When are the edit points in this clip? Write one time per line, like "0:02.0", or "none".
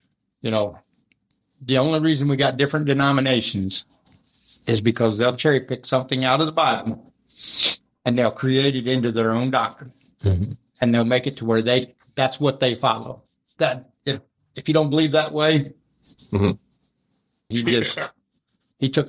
0:13.6
0:17.5